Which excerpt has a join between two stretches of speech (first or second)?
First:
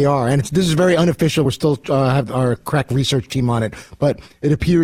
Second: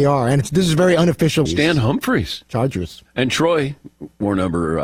second